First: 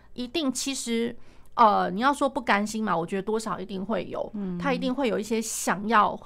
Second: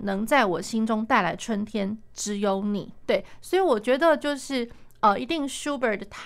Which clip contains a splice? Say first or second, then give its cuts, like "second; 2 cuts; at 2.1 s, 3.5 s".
second; 1 cut; at 3.0 s